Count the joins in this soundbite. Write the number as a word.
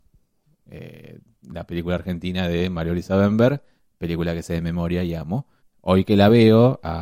one